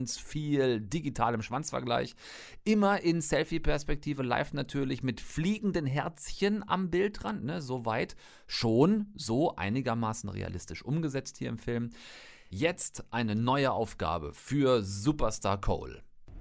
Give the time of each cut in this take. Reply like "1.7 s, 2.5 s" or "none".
none